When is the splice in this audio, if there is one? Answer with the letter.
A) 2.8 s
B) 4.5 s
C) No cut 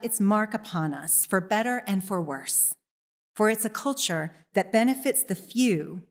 C